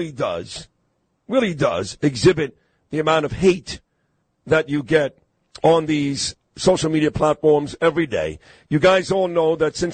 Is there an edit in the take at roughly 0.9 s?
no; 0 cuts

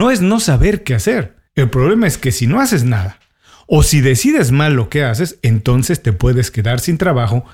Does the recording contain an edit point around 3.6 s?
no; 1 cut; at 1.5 s

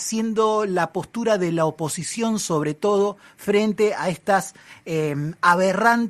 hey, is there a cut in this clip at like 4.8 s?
no; 0 cuts

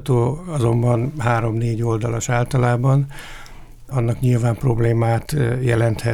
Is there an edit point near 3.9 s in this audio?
yes; 1 cut; at 3.9 s

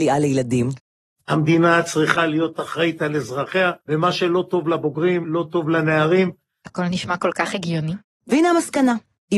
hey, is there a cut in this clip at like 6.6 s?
no; 2 cuts; at 3.8 s, 5.2 s

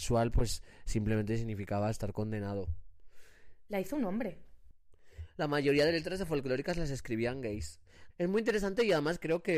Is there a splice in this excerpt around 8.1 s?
yes; 2 cuts; at 3.7 s, 8.1 s

